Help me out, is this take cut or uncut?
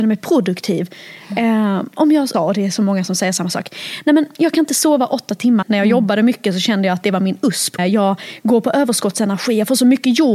cut